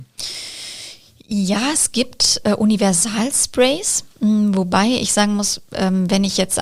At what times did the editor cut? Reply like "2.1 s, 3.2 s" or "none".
none